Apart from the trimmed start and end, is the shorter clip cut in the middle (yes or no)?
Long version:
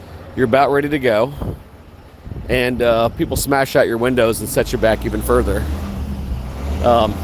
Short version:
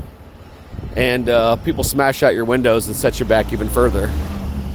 no